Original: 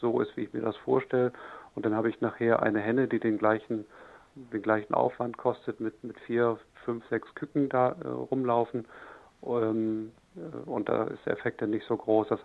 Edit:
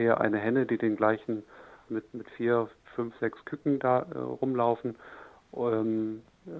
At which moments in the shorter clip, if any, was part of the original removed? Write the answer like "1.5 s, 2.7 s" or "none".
1.9 s

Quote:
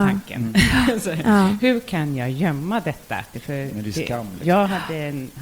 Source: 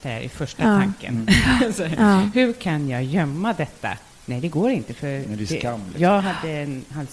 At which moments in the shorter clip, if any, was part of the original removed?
3.3 s

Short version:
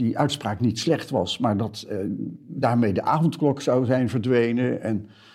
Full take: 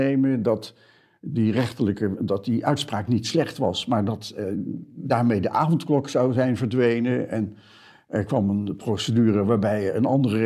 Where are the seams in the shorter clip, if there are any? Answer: none

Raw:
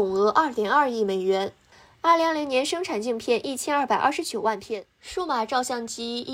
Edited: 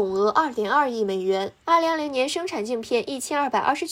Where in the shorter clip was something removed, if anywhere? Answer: 1.6 s

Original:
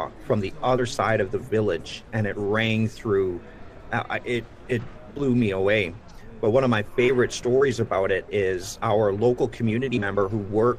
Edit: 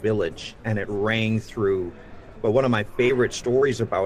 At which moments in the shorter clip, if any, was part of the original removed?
2.4 s

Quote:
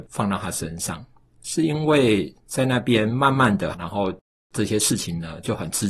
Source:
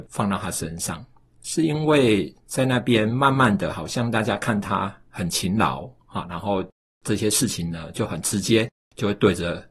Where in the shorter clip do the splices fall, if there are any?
3.7 s

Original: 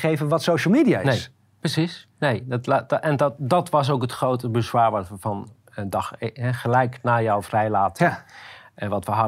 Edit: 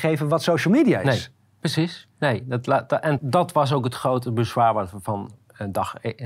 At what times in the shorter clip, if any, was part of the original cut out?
3.2 s

